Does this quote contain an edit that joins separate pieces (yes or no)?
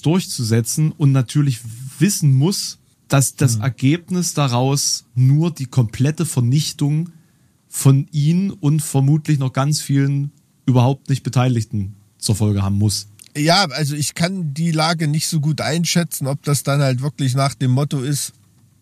no